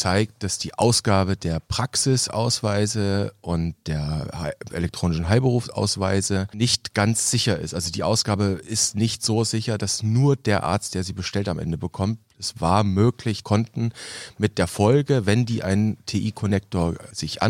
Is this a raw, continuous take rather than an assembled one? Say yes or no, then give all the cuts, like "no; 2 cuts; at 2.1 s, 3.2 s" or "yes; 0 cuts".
no; 1 cut; at 13.4 s